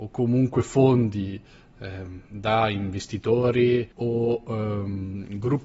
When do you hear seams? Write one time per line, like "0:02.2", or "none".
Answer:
0:03.9